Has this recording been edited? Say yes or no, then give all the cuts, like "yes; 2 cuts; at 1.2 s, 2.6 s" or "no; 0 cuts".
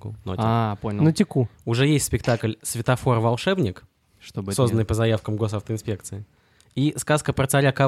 no; 0 cuts